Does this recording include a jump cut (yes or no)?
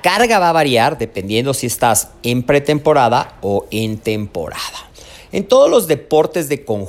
no